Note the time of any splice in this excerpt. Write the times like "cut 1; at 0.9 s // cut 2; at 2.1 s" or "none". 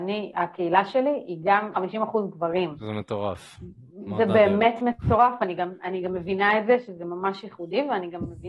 cut 1; at 1.7 s